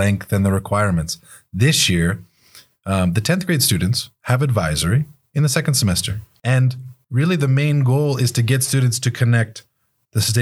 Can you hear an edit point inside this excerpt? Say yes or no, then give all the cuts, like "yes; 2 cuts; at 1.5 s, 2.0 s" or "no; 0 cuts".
yes; 1 cut; at 6.3 s